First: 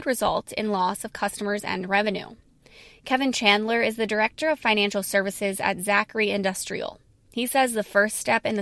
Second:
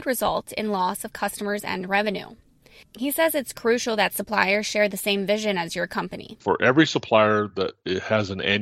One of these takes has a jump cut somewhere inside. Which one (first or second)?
second